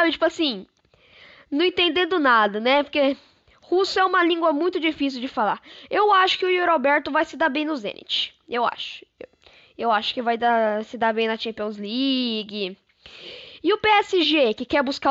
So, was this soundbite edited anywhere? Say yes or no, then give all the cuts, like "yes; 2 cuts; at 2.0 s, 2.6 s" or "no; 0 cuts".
no; 0 cuts